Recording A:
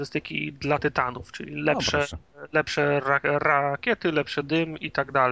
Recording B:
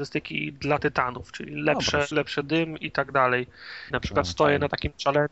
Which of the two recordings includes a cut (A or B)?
B